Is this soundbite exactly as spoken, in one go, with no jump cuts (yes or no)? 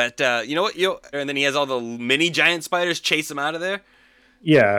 no